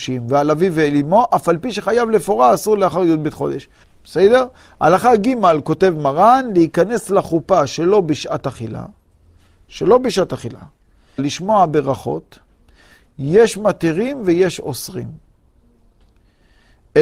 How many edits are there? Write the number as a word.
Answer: two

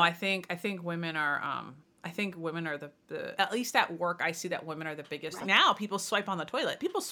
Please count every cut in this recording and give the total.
two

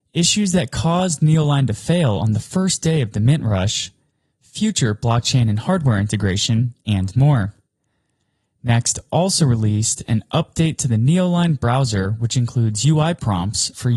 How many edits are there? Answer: zero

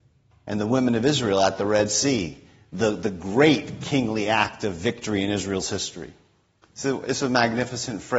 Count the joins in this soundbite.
one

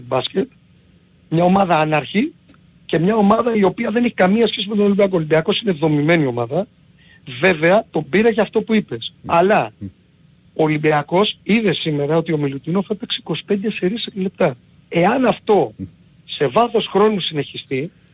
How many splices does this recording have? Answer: zero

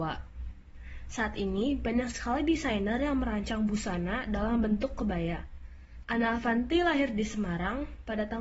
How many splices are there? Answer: one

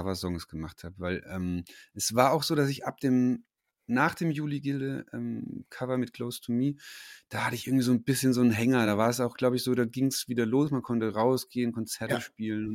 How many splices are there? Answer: zero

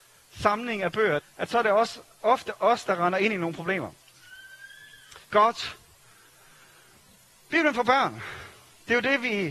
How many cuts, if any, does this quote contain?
two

